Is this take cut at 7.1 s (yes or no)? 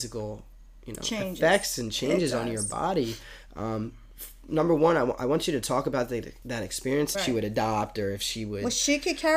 yes